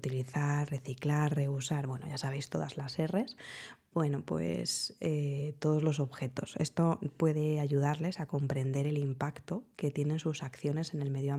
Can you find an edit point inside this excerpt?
no; 0 cuts

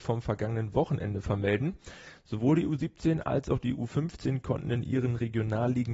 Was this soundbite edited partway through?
no; 0 cuts

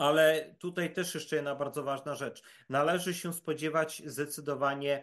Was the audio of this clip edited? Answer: no; 0 cuts

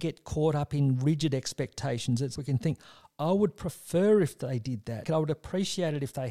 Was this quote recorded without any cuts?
no; 2 cuts; at 2.4 s, 5.1 s

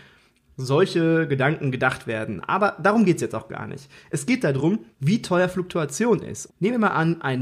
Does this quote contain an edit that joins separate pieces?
yes; 2 cuts; at 4.9 s, 6.5 s

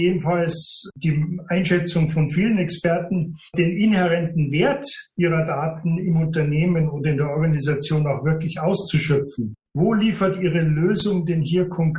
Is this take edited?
no; 0 cuts

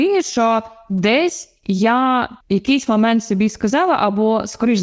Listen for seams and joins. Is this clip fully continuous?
no; 1 cut; at 2.4 s

